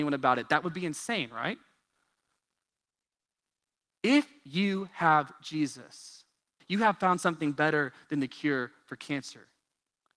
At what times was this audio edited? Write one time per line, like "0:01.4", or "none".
0:06.6